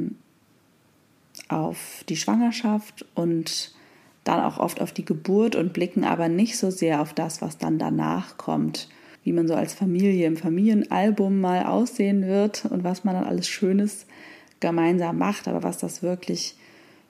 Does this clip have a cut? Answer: yes; 1 cut; at 9.2 s

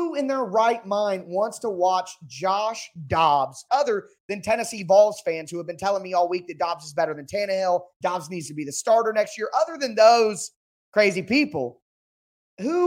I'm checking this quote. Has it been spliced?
yes; 2 cuts; at 3.7 s, 7.9 s

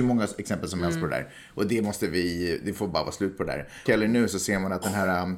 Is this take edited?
yes; 1 cut; at 3.9 s

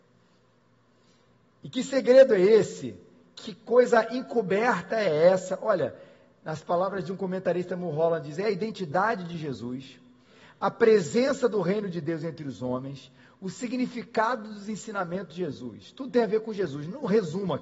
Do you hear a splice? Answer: no; 0 cuts

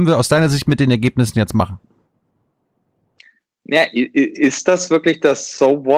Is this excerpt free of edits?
yes; 0 cuts

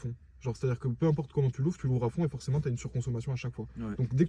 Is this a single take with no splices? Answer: yes; 0 cuts

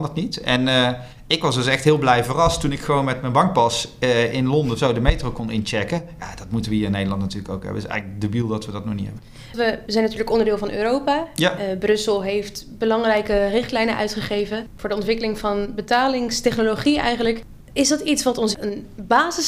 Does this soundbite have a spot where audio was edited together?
no; 0 cuts

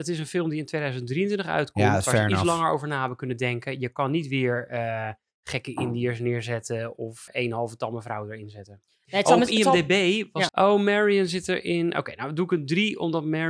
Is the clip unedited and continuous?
no; 2 cuts; at 7.3 s, 10.5 s

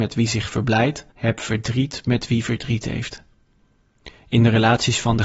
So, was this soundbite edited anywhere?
yes; 1 cut; at 1.1 s

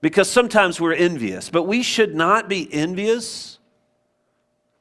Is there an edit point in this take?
no; 0 cuts

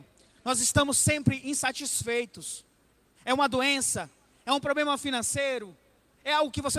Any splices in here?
yes; 1 cut; at 3.2 s

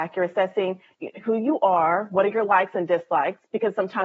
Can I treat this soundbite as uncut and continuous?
yes; 0 cuts

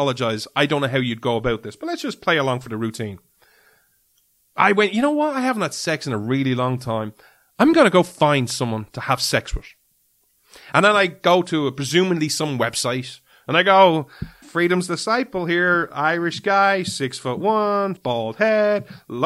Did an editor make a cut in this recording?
yes; 2 cuts; at 14.4 s, 17.9 s

